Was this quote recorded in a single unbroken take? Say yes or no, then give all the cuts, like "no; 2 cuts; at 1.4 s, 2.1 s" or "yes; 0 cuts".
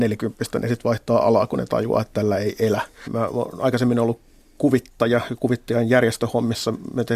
no; 1 cut; at 3.0 s